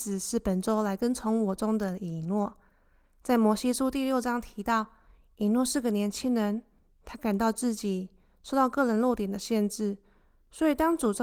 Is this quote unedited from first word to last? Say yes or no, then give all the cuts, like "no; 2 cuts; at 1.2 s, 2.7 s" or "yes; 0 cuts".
yes; 0 cuts